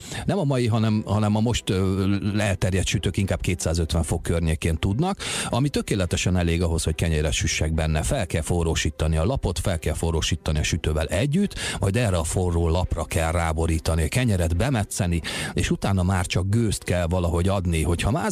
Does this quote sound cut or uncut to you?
uncut